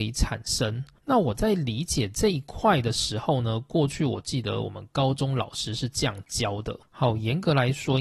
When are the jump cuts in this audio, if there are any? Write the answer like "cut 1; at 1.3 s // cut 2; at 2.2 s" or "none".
cut 1; at 1.0 s

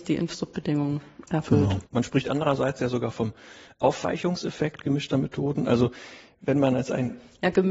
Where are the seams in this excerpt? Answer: cut 1; at 1.9 s

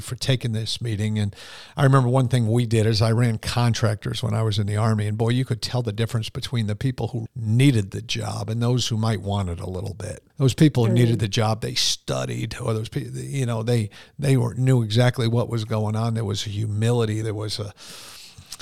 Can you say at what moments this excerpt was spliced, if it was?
cut 1; at 7.3 s // cut 2; at 10.3 s // cut 3; at 17.2 s

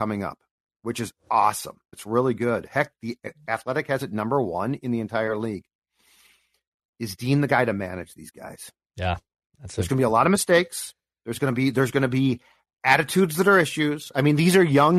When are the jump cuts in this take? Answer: cut 1; at 1.9 s

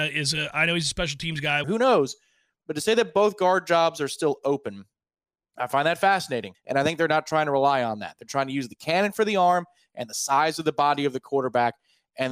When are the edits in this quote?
cut 1; at 1.6 s // cut 2; at 6.5 s

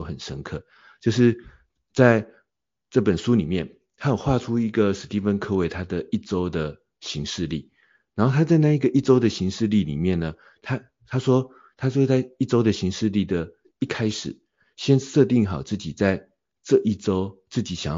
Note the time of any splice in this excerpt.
none

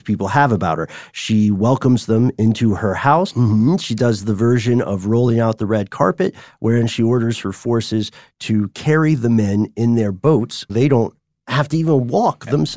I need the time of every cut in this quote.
cut 1; at 3.3 s // cut 2; at 10.7 s

